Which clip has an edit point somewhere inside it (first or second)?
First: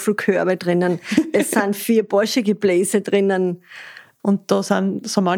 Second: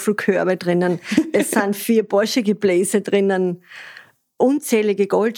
first